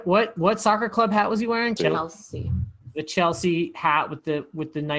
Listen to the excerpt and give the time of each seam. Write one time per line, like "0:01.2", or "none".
0:01.8